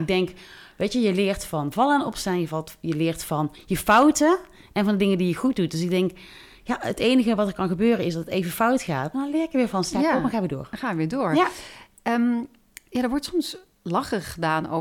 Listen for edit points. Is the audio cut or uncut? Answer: uncut